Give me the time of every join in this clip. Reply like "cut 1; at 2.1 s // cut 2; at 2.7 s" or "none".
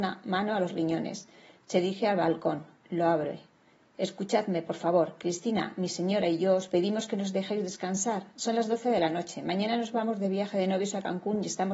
none